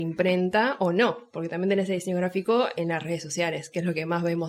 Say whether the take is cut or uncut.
uncut